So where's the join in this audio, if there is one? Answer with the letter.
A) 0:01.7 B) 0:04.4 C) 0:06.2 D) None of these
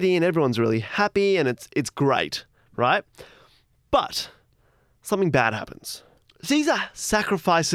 D